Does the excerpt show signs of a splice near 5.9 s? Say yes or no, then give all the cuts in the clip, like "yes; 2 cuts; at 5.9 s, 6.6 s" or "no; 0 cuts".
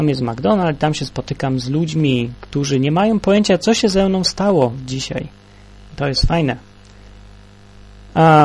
yes; 1 cut; at 5.9 s